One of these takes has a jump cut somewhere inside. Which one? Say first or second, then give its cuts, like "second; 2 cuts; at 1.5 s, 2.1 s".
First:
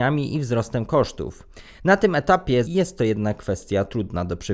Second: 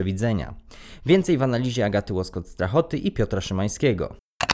first; 1 cut; at 2.7 s